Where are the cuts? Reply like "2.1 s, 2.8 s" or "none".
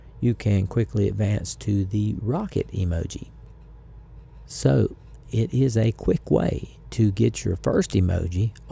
5.2 s